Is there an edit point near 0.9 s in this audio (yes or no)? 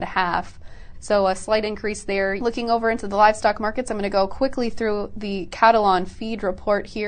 yes